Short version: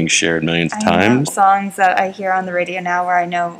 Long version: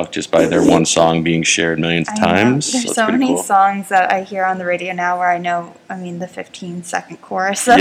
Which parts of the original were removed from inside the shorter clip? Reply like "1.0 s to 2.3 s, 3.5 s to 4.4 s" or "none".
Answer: 2.6 s to 3.4 s